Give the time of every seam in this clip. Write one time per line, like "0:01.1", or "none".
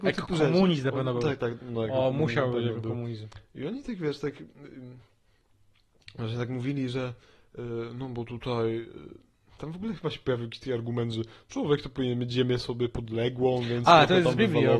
none